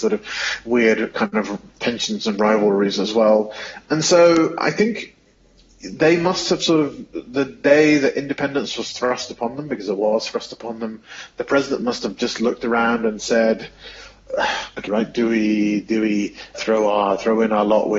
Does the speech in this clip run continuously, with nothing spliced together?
no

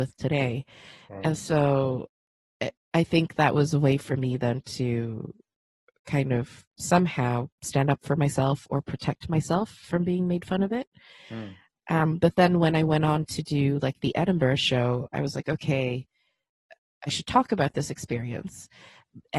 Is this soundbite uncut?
no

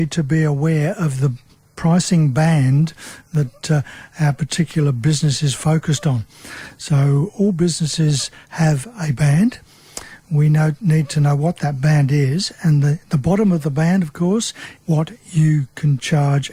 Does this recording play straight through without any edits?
no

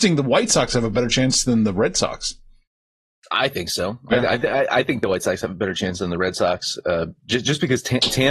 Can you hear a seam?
no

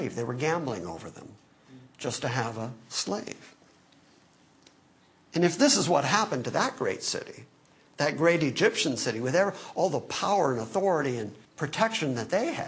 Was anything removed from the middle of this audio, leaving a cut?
yes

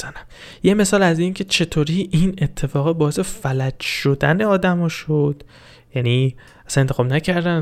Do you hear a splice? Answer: no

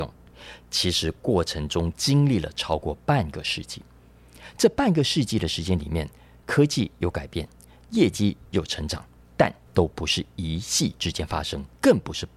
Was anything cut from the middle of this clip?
no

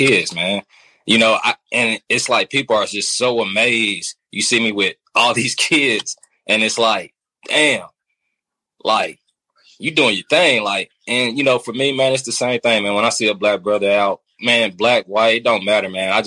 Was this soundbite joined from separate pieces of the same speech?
no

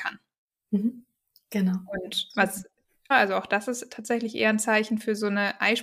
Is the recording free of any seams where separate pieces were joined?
no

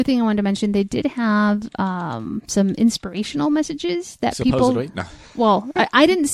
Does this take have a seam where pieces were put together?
no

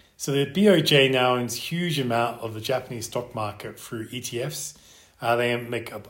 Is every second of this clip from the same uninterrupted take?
yes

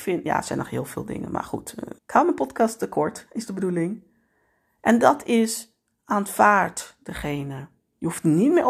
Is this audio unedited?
no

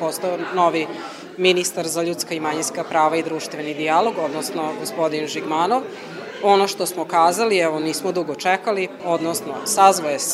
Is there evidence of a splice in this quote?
yes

